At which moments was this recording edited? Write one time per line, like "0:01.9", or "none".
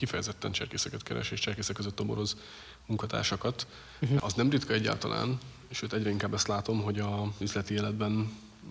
0:04.2
0:07.4